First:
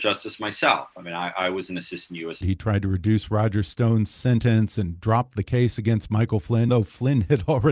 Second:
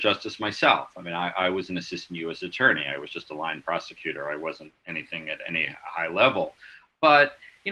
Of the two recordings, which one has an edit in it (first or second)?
first